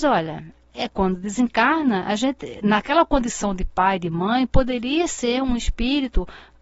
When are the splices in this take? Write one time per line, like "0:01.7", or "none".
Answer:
none